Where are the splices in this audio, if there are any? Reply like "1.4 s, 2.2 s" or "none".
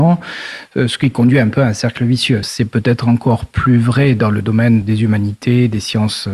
2.4 s, 4.8 s